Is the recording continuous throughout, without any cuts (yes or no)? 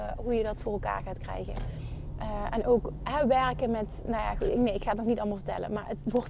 yes